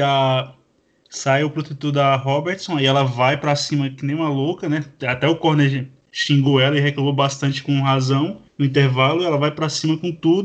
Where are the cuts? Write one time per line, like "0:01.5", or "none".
0:08.5